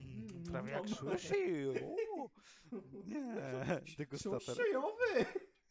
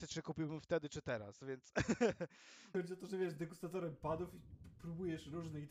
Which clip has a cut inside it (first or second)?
second